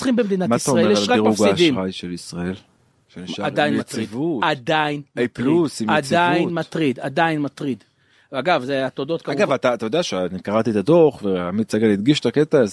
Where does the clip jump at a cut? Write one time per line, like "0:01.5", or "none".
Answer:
none